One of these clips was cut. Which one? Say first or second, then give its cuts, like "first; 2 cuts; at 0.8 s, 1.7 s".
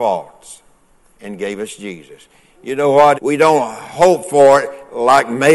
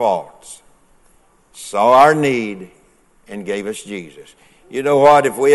first; 2 cuts; at 1.1 s, 3.1 s